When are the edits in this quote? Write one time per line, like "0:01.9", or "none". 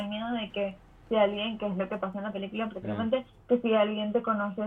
none